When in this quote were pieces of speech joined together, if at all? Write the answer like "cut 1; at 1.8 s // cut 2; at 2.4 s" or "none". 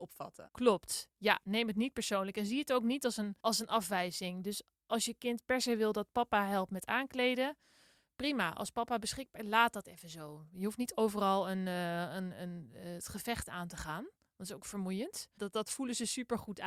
cut 1; at 3.4 s // cut 2; at 15.4 s